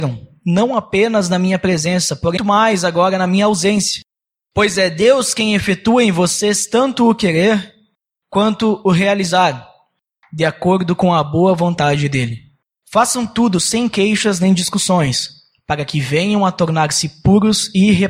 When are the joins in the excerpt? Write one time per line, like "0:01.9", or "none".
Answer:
0:02.4
0:04.3